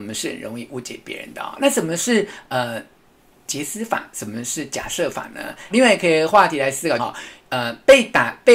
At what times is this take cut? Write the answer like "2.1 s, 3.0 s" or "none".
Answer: 5.7 s, 7.0 s